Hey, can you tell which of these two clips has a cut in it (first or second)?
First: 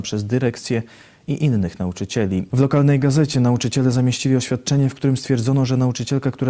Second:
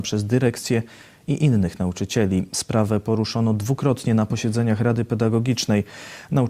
first